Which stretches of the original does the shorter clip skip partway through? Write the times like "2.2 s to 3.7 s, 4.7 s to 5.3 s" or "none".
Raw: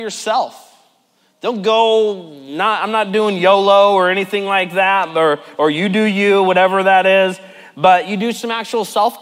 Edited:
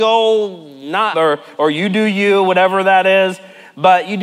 2.8 s to 5.1 s